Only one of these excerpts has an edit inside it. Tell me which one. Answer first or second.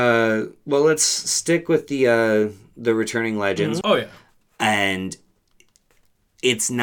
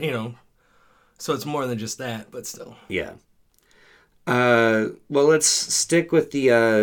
first